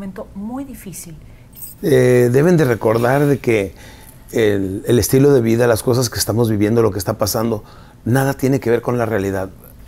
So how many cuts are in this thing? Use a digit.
1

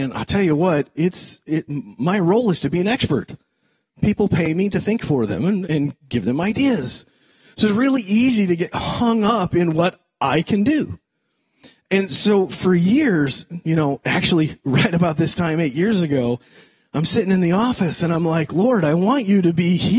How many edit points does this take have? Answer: 1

